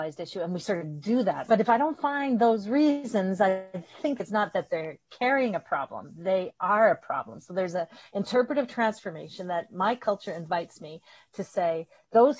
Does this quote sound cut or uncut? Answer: cut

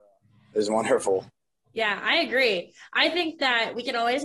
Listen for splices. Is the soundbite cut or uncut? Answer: uncut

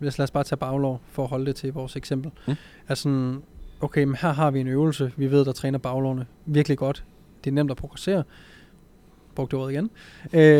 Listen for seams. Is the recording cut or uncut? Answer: uncut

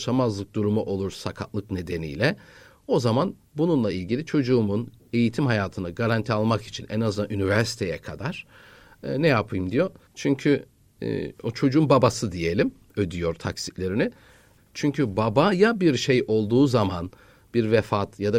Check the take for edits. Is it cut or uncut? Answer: cut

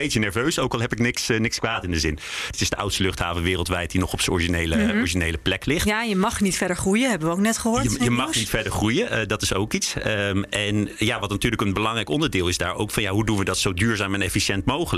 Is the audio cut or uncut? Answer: cut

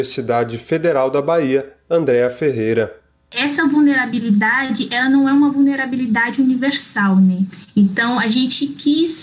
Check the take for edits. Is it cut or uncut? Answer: uncut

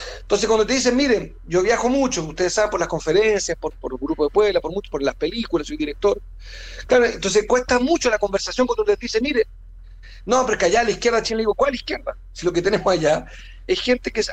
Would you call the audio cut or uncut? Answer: uncut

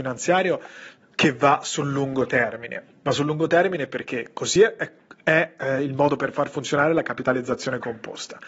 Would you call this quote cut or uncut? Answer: uncut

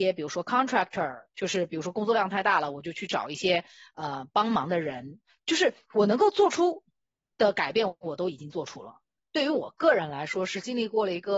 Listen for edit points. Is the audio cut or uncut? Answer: cut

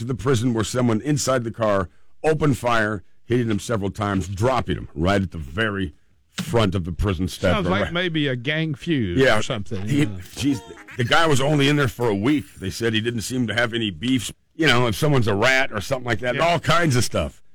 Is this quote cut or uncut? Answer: cut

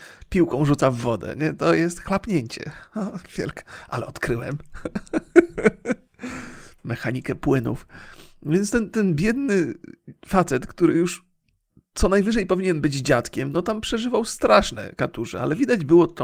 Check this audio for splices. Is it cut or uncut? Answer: uncut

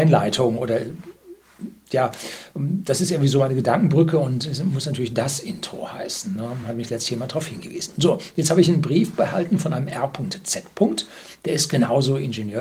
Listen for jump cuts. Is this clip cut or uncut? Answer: uncut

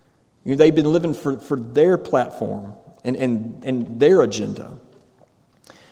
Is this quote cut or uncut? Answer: cut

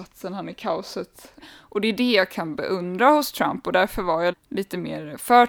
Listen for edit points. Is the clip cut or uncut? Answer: cut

